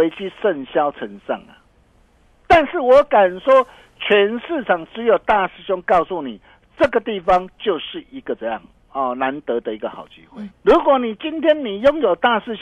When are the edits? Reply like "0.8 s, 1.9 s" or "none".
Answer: 10.5 s